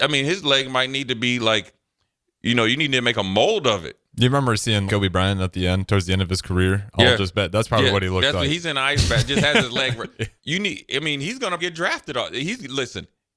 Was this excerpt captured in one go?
no; 3 cuts; at 4.9 s, 10.4 s, 11.6 s

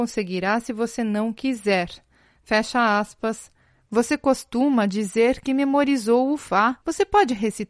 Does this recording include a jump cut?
yes; 1 cut; at 3.9 s

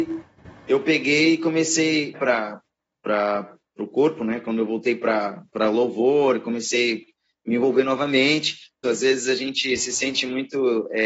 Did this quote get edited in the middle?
yes; 2 cuts; at 2.1 s, 8.8 s

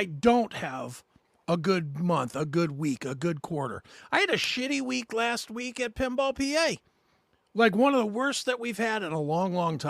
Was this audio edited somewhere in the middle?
no; 0 cuts

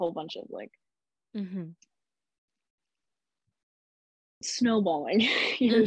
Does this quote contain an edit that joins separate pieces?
no; 0 cuts

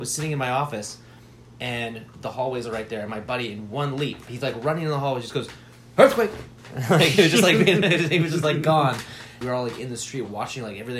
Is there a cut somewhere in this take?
yes; 2 cuts; at 4.3 s, 9.4 s

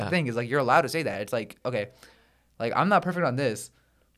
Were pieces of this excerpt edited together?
no; 0 cuts

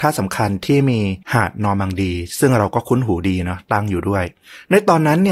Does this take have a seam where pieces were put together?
yes; 1 cut; at 1.2 s

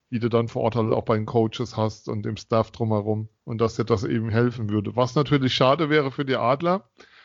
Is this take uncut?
no; 1 cut; at 3.4 s

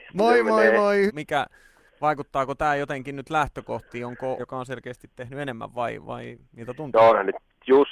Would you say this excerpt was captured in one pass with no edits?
no; 3 cuts; at 1.1 s, 4.4 s, 6.4 s

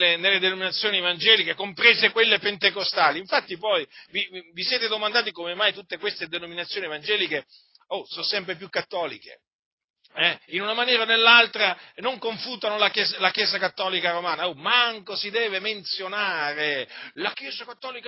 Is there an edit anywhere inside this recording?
no; 0 cuts

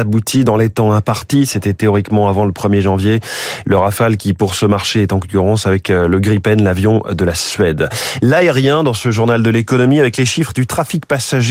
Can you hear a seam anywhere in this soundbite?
no; 0 cuts

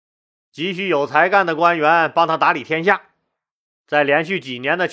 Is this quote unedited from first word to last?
no; 1 cut; at 3.8 s

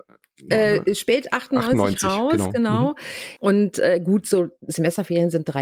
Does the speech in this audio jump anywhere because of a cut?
yes; 1 cut; at 3.4 s

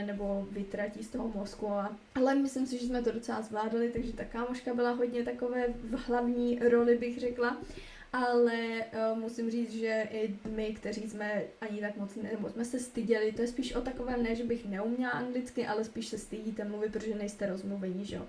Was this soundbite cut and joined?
no; 0 cuts

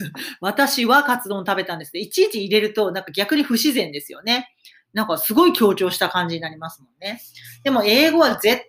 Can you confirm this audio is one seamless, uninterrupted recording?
yes; 0 cuts

